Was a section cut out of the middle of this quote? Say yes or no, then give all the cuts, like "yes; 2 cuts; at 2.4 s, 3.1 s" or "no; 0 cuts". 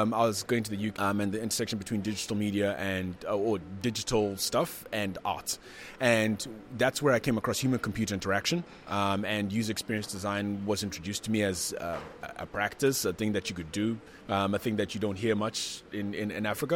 yes; 2 cuts; at 0.9 s, 14.2 s